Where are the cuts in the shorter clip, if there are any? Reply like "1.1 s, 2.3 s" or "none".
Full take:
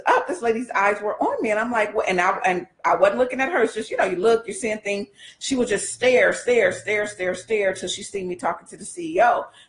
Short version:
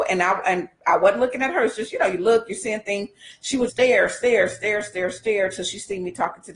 3.7 s